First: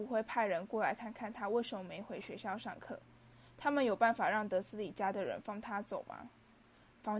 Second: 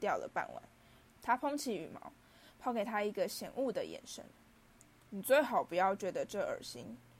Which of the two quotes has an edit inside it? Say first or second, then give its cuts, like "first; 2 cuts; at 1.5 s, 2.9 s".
second; 1 cut; at 1.1 s